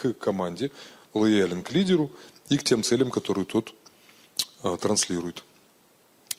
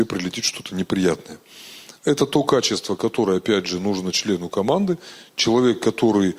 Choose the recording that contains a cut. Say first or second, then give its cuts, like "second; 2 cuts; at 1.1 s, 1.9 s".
second; 1 cut; at 2.0 s